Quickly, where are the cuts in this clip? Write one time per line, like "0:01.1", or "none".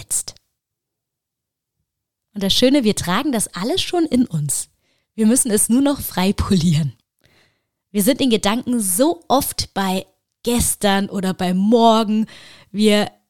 none